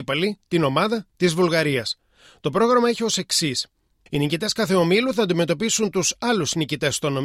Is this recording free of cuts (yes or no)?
no